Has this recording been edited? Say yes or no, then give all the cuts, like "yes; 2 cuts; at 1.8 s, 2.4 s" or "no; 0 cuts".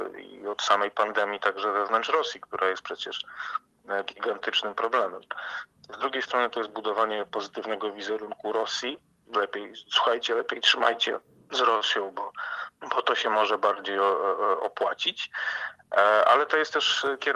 yes; 1 cut; at 5.8 s